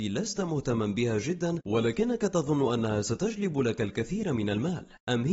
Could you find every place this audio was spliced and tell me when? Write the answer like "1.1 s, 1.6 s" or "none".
none